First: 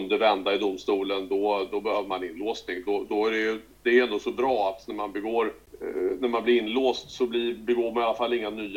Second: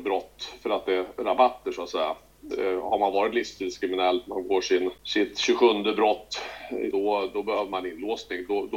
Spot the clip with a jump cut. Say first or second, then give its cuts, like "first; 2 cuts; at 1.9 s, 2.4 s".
second; 2 cuts; at 2.5 s, 6.9 s